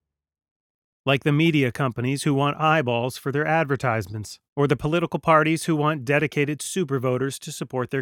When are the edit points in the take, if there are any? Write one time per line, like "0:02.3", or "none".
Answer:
0:00.9
0:04.5